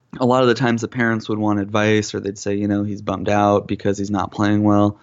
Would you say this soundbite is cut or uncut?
uncut